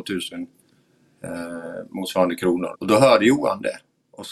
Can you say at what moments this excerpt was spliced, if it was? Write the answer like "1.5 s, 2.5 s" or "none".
2.7 s